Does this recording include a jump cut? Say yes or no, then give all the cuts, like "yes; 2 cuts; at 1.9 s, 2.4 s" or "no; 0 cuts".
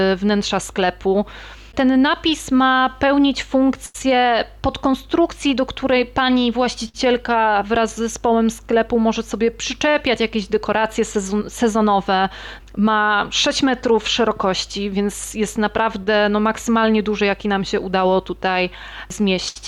yes; 2 cuts; at 1.7 s, 12.6 s